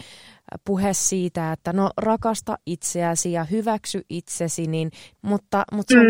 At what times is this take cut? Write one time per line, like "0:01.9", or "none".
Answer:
0:05.1